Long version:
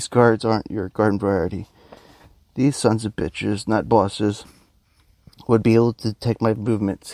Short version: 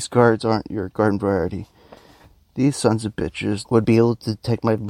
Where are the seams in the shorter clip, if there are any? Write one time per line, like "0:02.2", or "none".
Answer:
0:03.6